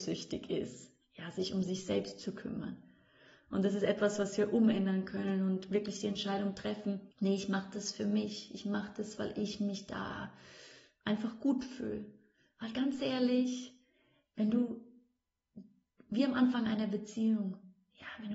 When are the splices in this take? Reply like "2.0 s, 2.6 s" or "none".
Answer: 7.1 s